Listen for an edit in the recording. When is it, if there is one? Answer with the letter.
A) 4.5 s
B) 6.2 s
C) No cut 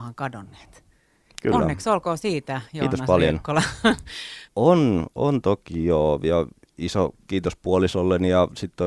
A